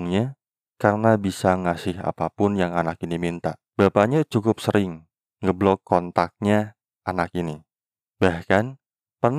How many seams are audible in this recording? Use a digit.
1